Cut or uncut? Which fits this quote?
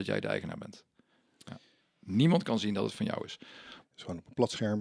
cut